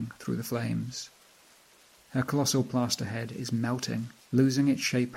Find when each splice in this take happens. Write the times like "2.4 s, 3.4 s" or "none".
1.9 s

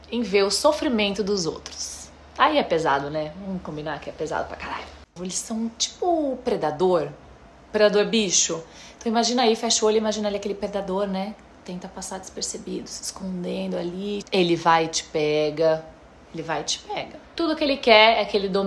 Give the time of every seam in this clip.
5.2 s, 14.2 s, 17.2 s

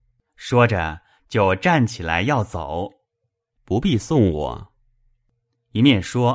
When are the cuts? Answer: 3.5 s

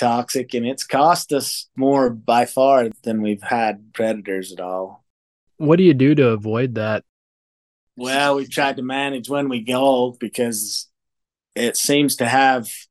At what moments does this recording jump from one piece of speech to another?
none

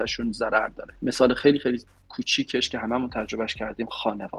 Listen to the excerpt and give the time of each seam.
none

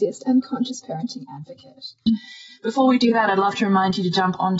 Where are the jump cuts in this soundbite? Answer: 2.1 s

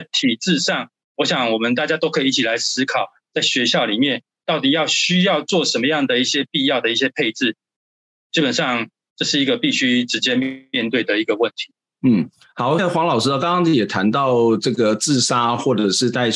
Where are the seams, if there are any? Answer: 12.8 s

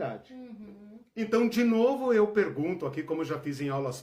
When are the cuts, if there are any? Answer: none

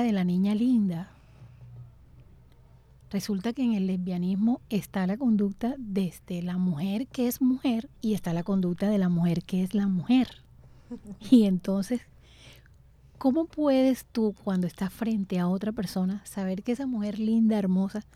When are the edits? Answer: 8.0 s

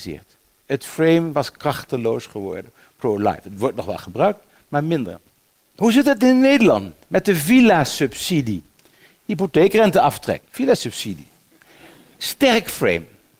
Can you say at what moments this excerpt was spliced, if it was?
10.4 s

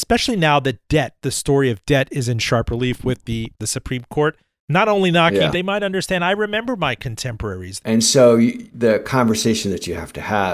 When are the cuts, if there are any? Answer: 3.5 s, 5.5 s, 7.8 s

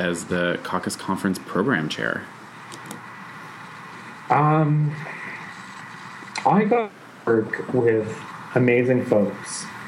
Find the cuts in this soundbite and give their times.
4.3 s

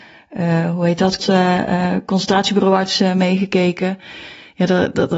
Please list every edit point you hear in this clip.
1.2 s

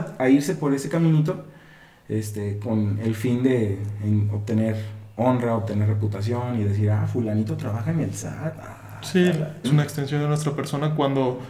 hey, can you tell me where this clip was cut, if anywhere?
9.6 s

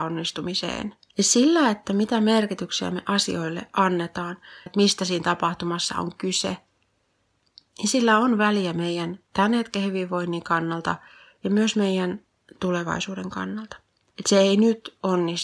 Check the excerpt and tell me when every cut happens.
1.1 s, 4.7 s, 14.1 s

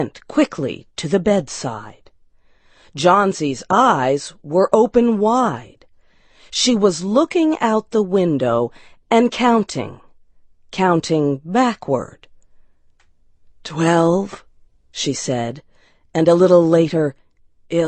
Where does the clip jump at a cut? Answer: none

